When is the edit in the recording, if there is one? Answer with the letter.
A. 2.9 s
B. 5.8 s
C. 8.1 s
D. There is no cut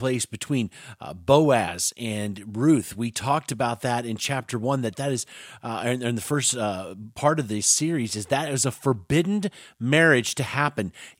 D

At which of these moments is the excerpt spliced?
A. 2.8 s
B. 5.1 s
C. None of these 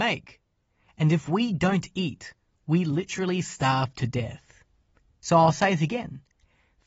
B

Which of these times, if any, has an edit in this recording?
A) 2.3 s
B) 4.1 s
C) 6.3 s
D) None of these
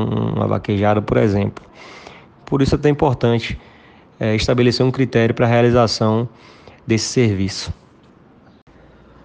A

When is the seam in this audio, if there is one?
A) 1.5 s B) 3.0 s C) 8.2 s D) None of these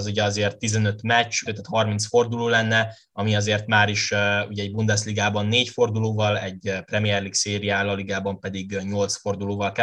A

